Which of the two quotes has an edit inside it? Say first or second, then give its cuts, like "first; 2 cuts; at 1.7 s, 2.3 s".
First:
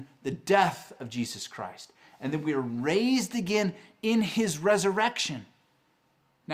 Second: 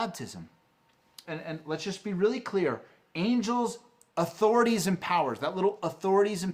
second; 1 cut; at 1.2 s